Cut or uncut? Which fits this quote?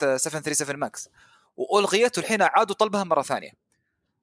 uncut